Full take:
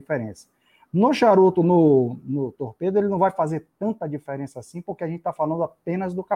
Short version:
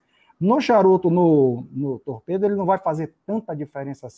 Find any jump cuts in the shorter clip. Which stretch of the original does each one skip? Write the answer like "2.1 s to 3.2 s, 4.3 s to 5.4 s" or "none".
none